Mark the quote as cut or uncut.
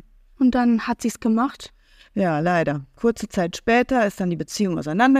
uncut